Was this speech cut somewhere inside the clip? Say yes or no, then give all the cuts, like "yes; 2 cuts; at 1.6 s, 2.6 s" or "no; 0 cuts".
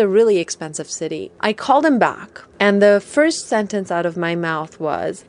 no; 0 cuts